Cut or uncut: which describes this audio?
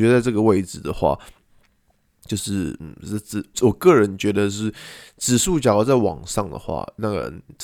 cut